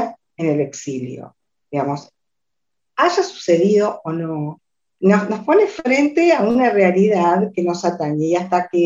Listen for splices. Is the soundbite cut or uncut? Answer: uncut